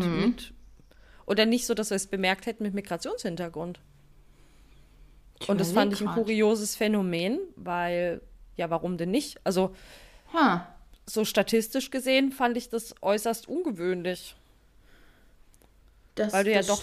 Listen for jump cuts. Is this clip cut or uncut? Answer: uncut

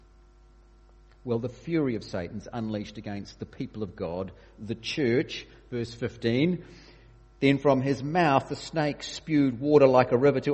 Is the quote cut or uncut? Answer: uncut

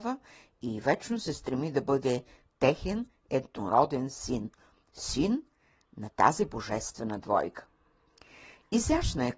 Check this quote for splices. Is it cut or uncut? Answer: uncut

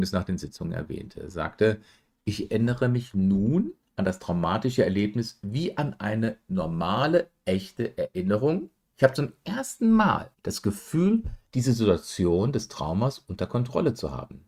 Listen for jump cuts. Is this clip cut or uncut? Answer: cut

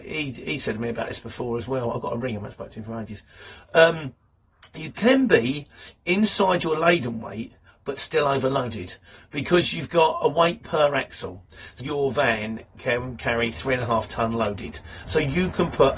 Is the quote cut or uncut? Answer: cut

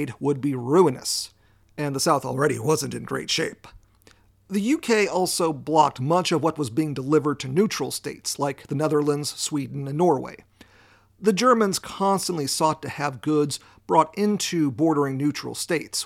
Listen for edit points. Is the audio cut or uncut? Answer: uncut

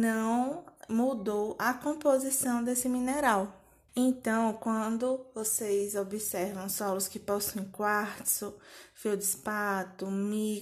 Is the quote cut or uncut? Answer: cut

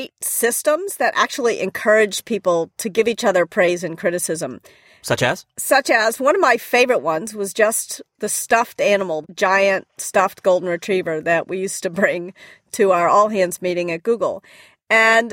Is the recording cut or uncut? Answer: cut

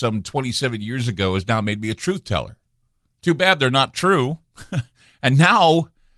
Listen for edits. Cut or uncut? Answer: cut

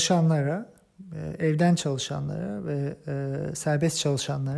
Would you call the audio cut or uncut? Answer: uncut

